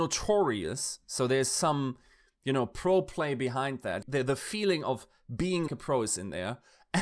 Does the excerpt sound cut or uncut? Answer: cut